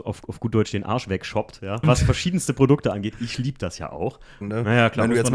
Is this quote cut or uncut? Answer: cut